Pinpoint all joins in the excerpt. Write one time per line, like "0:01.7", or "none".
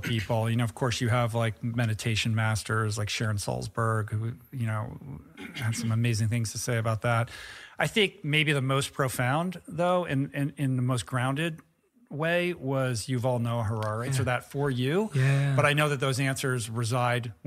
0:14.1